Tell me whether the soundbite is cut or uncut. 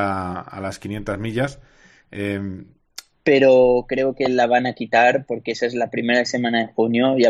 cut